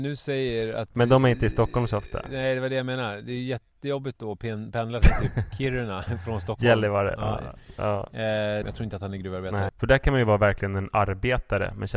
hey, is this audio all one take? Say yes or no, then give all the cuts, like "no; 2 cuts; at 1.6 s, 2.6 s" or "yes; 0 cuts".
no; 2 cuts; at 8.6 s, 9.7 s